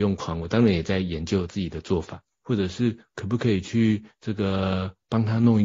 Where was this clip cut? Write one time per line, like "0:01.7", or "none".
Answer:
0:02.4